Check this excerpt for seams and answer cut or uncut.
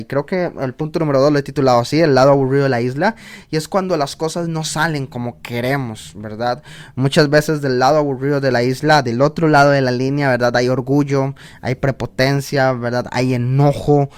uncut